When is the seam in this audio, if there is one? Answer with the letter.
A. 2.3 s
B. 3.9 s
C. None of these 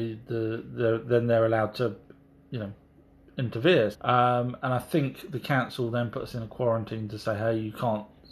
B